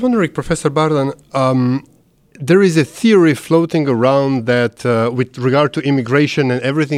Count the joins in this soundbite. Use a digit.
0